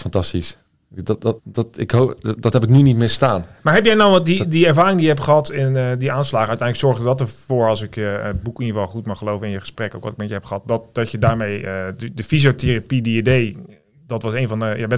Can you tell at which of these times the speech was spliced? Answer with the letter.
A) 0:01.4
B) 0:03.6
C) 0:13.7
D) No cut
A